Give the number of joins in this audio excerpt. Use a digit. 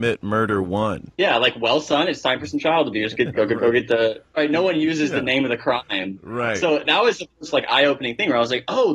1